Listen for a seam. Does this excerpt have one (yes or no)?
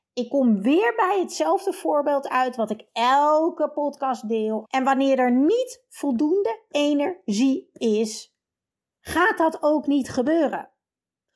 yes